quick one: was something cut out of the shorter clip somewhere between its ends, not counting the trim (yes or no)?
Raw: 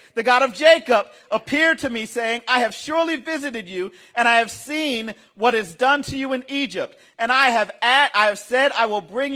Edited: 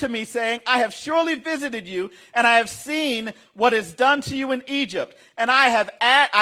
no